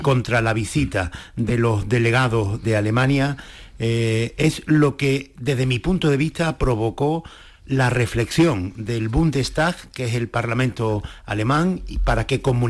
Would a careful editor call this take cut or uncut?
cut